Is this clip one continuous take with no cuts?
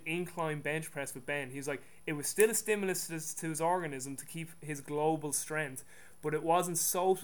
yes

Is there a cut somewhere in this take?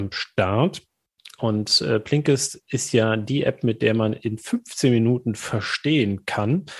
no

